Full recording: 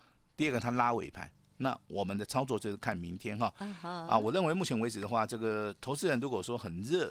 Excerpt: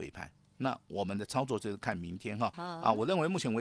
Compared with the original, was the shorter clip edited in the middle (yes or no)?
yes